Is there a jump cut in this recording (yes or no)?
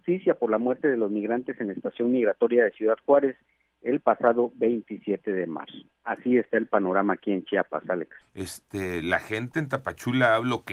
yes